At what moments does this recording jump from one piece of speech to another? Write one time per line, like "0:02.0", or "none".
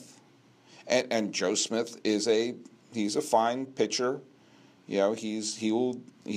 0:02.8

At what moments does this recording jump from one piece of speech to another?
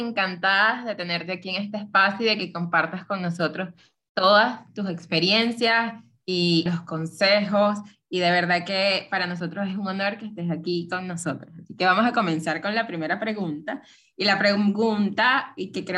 0:06.7

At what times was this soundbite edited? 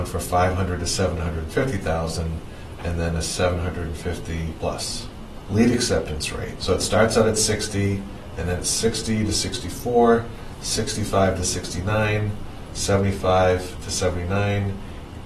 0:06.6
0:12.7

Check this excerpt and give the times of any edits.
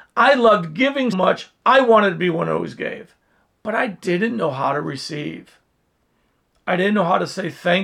0:01.1

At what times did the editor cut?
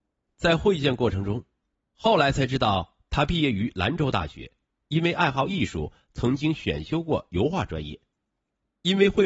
0:01.8

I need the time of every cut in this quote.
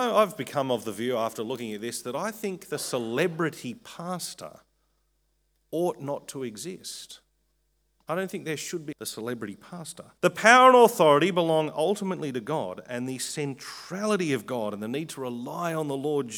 0:08.9
0:10.1

